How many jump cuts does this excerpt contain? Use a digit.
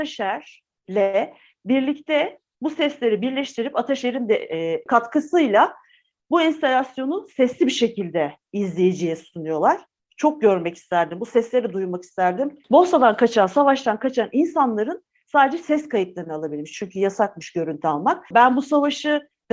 3